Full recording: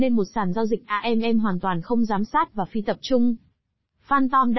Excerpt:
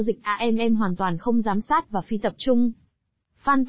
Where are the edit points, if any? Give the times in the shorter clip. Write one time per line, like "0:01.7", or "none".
none